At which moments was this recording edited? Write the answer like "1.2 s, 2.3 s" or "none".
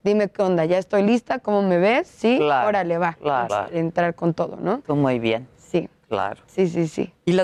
3.5 s